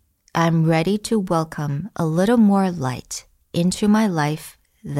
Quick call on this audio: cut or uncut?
uncut